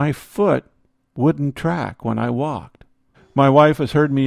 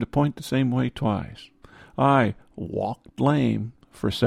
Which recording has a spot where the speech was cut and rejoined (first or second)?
first